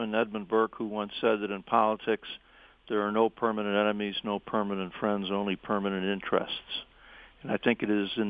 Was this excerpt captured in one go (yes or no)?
yes